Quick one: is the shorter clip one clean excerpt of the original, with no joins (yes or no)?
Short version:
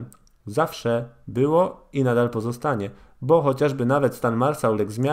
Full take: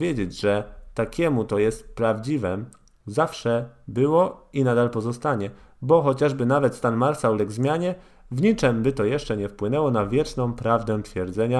yes